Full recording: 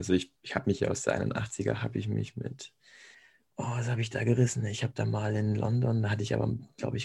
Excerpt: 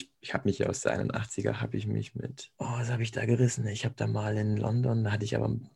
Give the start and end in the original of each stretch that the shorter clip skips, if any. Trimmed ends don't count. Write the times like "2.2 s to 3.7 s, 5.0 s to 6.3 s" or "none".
2.8 s to 3.5 s

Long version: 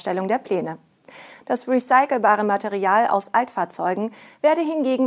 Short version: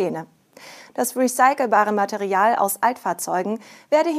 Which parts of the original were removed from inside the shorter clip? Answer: none

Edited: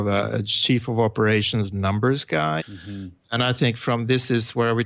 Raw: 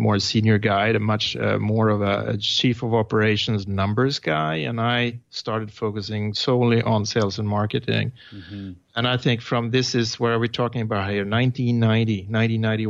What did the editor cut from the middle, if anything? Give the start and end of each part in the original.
4.5 s to 8.2 s

